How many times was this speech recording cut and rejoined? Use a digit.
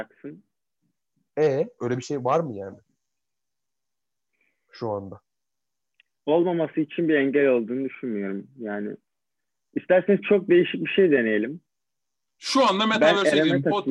1